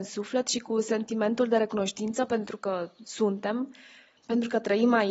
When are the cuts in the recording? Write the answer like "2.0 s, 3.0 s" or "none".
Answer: none